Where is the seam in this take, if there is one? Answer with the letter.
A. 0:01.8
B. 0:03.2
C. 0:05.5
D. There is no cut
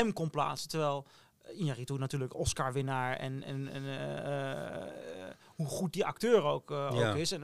D